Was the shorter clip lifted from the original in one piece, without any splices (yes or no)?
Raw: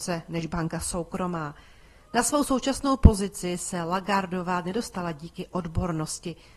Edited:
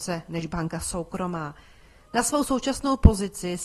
yes